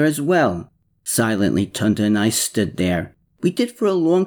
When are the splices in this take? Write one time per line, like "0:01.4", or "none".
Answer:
0:01.0